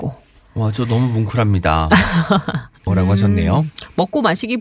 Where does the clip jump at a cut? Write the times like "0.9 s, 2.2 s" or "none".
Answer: 2.9 s